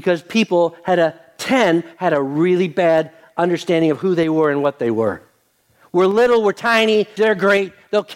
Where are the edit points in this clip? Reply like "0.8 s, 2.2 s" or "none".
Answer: 7.2 s